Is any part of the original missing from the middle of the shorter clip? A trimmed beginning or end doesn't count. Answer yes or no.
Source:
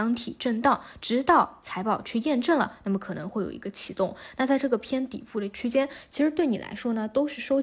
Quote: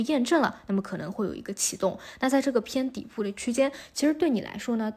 no